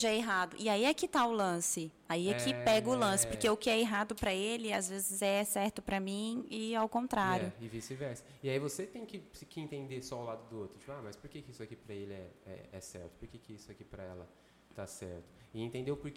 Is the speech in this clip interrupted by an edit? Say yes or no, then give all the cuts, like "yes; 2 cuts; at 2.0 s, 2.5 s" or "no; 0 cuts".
no; 0 cuts